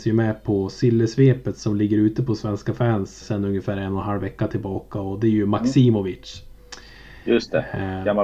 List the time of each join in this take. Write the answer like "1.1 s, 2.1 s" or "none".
3.2 s